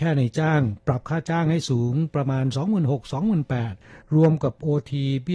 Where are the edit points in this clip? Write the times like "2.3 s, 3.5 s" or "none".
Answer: none

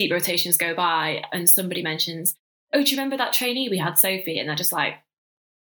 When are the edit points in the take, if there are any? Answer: none

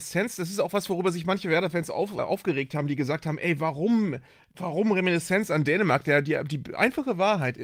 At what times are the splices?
2.2 s

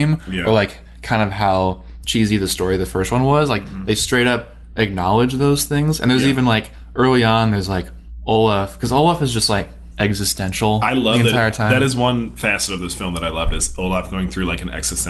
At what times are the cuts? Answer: none

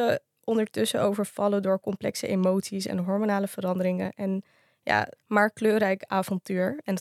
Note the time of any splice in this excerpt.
5.2 s

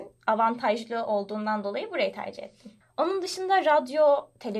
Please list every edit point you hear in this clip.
2.8 s

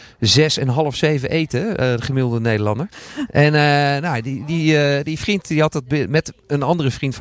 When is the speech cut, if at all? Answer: 2.9 s

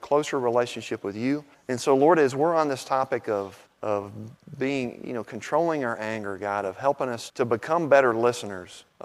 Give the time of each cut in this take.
7.3 s

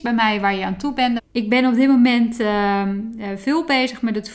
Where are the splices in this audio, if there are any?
1.2 s

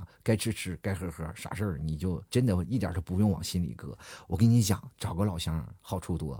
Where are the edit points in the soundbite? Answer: 2.3 s

